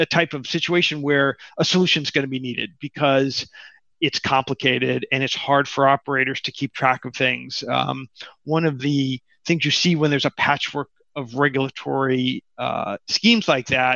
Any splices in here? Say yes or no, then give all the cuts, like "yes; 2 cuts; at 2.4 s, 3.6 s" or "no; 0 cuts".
no; 0 cuts